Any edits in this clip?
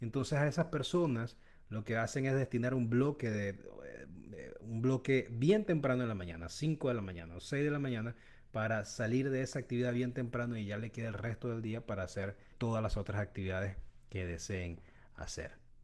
yes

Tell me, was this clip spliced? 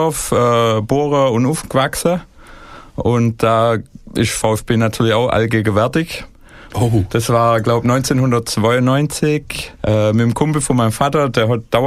yes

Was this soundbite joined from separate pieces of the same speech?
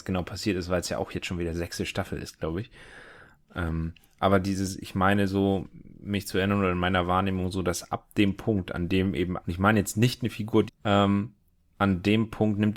yes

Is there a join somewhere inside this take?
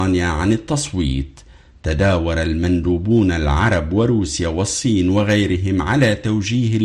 no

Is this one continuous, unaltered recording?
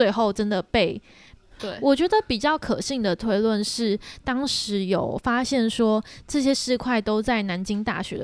no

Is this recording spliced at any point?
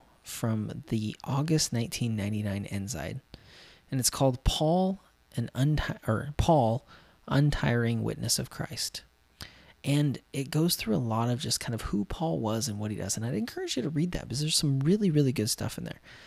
no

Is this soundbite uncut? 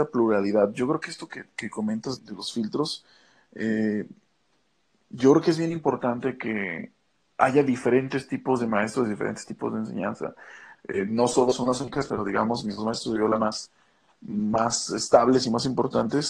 no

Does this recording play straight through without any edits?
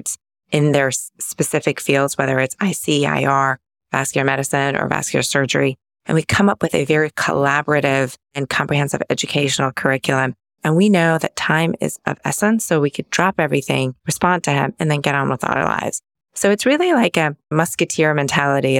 no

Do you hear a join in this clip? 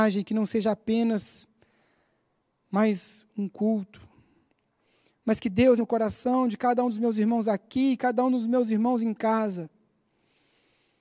yes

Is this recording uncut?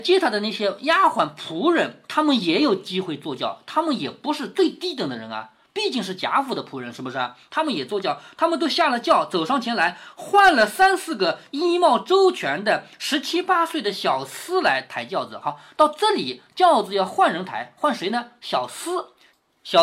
yes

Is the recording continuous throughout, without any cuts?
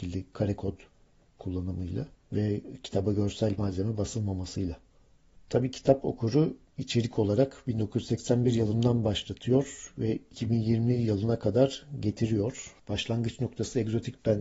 yes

